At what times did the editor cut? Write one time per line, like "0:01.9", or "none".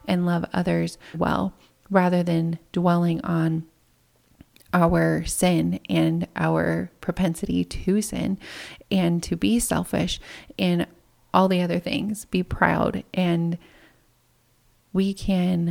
0:01.1